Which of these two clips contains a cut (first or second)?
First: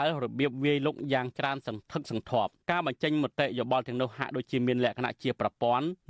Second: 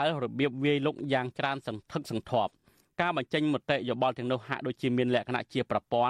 first